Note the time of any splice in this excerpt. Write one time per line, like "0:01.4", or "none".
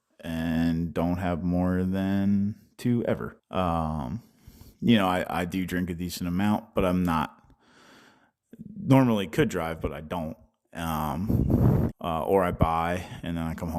0:03.4
0:11.9

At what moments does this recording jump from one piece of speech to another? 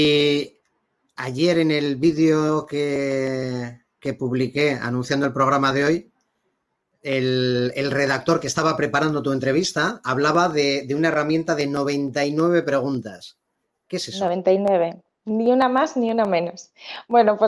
none

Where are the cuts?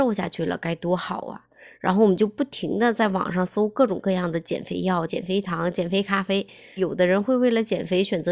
0:05.1
0:06.8

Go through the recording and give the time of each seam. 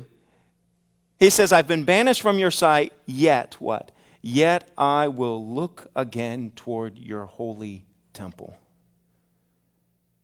none

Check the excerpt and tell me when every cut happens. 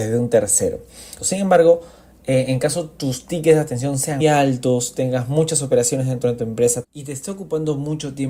0:01.2
0:04.2
0:06.8

